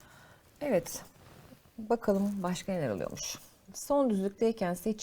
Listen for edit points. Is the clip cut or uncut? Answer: uncut